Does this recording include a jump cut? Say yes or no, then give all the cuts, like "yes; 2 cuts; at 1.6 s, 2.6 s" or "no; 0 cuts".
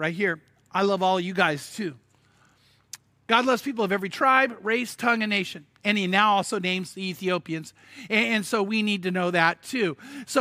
no; 0 cuts